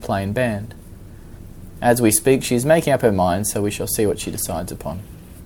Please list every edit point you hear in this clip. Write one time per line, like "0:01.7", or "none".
none